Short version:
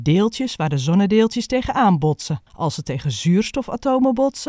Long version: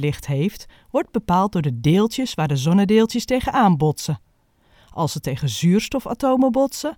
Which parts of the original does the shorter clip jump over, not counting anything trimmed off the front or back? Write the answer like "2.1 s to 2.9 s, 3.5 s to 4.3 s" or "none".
4.3 s to 4.8 s